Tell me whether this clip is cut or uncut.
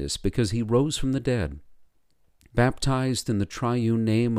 cut